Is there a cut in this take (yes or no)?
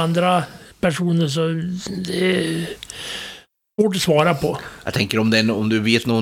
no